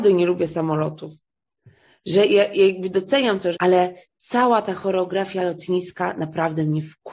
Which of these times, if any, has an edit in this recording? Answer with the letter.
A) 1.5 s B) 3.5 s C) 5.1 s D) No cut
B